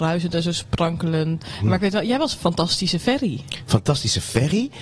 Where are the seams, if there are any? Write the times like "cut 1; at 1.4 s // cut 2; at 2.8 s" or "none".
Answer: cut 1; at 1.4 s